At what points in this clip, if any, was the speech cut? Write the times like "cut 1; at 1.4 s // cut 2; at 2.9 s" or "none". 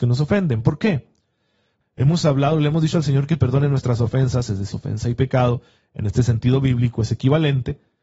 cut 1; at 1.8 s // cut 2; at 4.7 s

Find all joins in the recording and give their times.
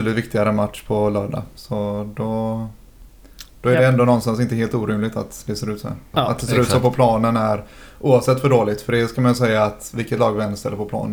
cut 1; at 6.1 s

